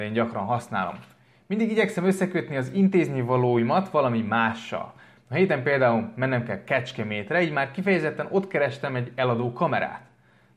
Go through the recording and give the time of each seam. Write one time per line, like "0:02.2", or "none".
none